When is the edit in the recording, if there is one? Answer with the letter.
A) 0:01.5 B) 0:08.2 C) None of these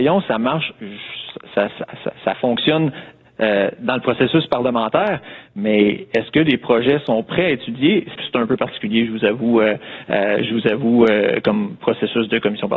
B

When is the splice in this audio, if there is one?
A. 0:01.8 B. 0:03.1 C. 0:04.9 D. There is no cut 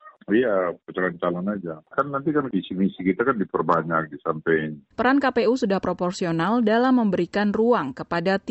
C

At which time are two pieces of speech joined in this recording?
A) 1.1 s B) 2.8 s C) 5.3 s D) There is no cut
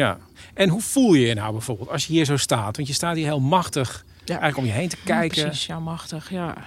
D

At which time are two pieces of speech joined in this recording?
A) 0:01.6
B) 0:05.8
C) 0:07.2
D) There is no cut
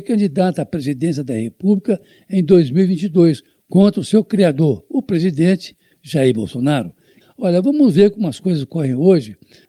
C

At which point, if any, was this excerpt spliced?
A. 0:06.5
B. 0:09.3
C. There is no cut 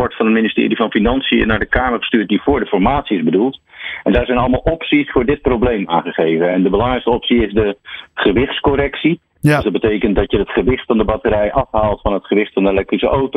C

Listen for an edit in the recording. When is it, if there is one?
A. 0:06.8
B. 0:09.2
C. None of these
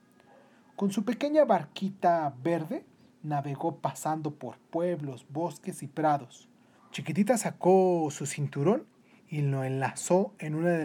A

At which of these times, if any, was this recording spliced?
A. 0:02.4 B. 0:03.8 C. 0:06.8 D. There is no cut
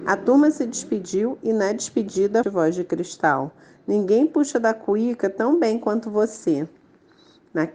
A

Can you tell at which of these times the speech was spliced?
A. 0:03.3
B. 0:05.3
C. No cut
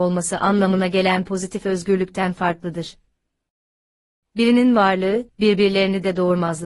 B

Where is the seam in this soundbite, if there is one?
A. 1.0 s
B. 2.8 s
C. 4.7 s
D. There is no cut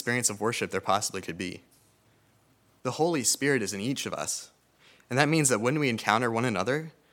B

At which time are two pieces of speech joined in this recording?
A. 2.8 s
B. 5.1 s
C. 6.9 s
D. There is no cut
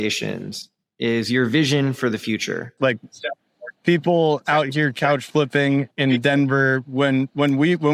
A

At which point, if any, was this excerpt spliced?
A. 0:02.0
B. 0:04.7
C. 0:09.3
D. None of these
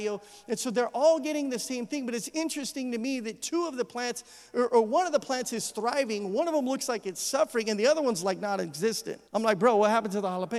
C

